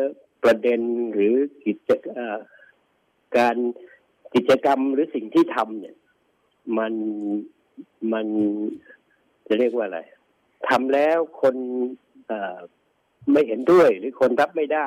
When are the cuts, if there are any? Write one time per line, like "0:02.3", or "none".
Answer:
none